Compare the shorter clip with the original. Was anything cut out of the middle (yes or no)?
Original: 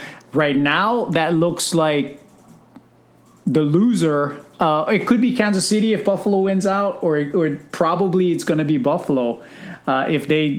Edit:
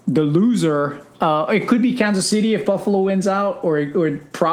no